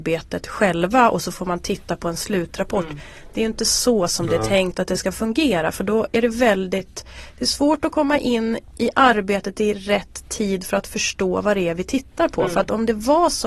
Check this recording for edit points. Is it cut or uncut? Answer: uncut